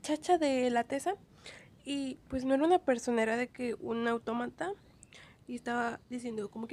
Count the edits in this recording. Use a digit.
0